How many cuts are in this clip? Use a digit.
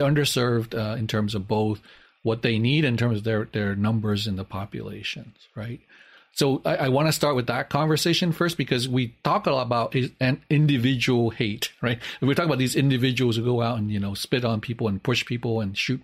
0